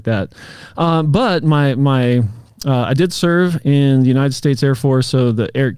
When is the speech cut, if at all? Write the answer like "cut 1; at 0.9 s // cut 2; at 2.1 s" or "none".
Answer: none